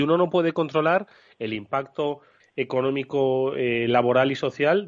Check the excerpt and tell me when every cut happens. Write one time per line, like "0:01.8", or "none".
0:02.4